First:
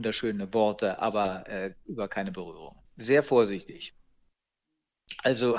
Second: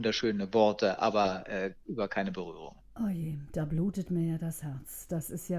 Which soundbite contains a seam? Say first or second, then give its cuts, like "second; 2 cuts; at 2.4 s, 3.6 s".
first; 1 cut; at 2.8 s